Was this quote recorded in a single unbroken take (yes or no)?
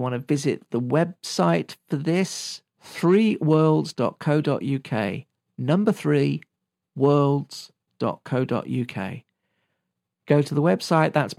yes